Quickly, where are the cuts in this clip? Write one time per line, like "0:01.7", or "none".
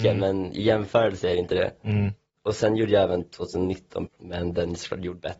0:04.1